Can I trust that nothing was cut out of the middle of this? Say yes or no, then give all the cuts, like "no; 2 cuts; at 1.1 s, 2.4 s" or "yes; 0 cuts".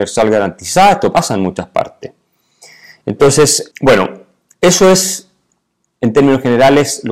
no; 1 cut; at 3.7 s